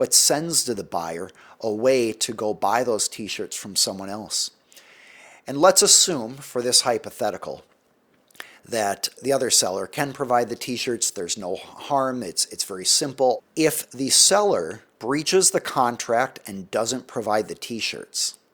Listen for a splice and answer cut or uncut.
cut